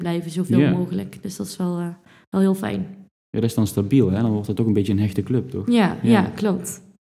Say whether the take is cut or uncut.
uncut